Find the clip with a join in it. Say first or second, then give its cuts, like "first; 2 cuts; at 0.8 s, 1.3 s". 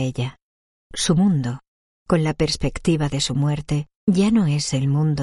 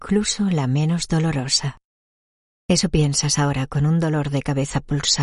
first; 2 cuts; at 1.9 s, 4.0 s